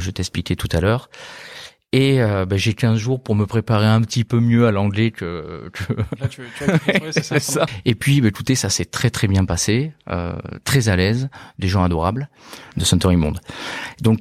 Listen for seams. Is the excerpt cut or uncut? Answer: cut